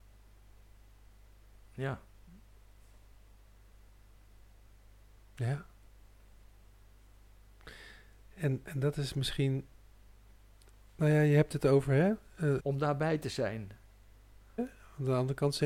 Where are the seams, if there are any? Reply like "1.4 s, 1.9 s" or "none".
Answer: 12.6 s, 14.6 s